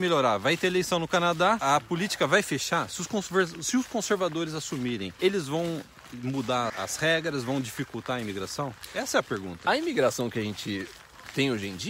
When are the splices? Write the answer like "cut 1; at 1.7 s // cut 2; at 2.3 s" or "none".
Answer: cut 1; at 6.7 s